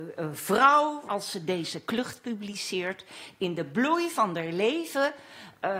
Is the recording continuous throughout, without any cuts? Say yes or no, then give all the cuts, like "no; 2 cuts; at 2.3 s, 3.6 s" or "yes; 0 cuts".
no; 1 cut; at 1.1 s